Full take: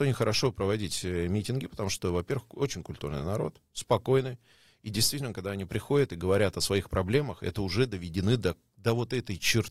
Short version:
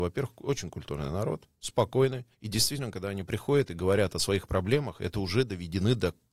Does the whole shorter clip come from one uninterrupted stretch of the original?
no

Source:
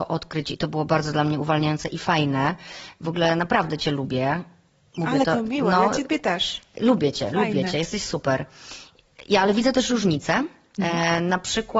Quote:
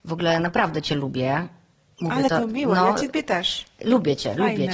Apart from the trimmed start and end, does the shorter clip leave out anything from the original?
no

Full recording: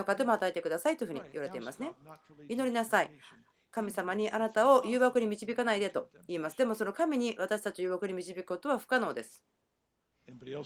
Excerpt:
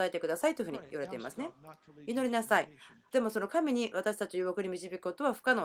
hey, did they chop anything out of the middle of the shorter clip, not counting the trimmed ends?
yes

